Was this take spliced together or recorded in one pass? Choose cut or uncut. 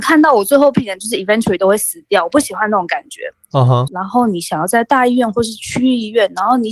cut